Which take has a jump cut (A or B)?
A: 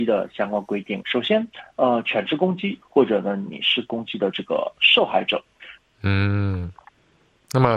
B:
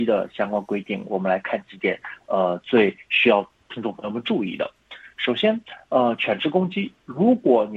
A